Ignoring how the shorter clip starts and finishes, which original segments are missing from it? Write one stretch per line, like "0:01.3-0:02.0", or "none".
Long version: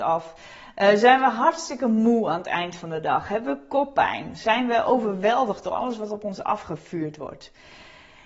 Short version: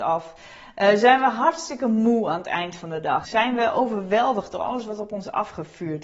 0:03.2-0:04.4